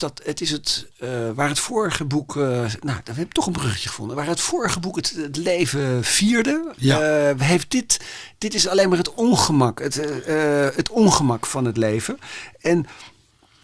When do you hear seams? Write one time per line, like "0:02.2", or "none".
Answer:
none

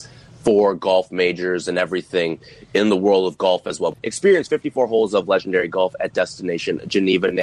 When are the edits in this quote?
0:03.9

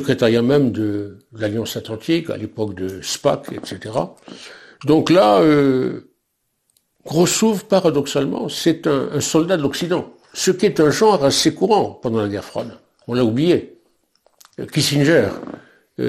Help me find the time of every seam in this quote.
none

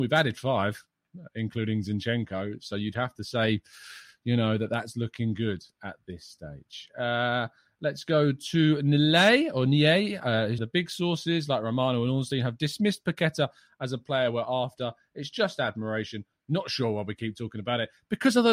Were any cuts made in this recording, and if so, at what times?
0:10.6

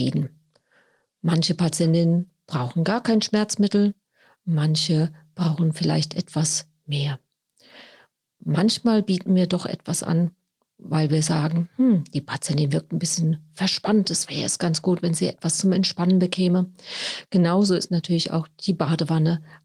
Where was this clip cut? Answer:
none

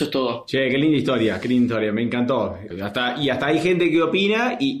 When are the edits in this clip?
0:02.7

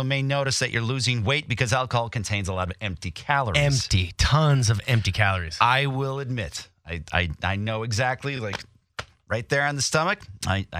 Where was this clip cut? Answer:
none

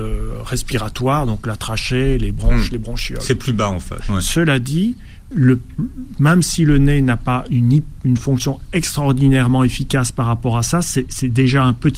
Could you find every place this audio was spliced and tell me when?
0:04.0
0:05.3

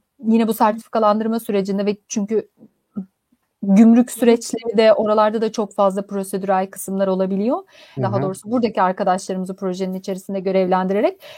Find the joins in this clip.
0:08.0

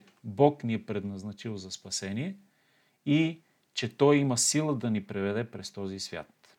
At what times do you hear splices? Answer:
none

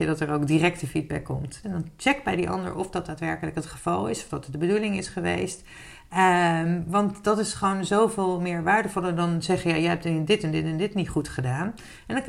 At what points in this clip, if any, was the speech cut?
0:01.6

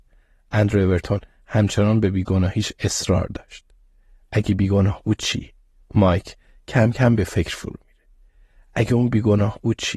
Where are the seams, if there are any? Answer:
none

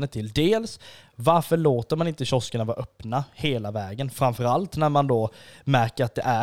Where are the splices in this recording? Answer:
none

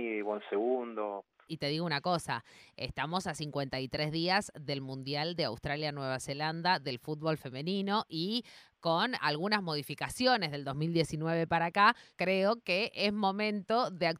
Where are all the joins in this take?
0:01.5
0:12.1

